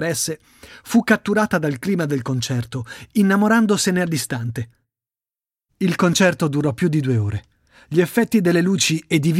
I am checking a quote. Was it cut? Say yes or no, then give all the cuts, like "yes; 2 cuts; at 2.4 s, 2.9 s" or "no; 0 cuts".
no; 0 cuts